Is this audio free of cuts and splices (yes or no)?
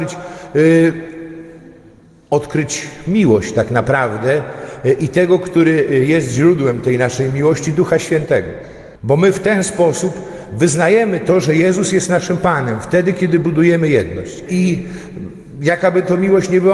no